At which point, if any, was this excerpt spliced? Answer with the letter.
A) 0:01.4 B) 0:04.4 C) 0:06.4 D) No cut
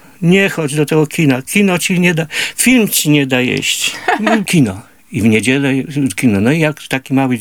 B